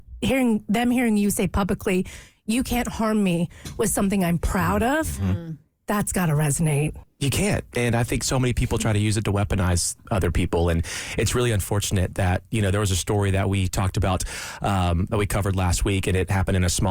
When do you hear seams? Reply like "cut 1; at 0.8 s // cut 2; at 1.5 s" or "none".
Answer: cut 1; at 7.0 s